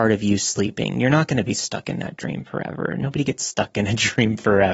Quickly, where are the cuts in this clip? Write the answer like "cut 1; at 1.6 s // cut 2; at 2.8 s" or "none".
none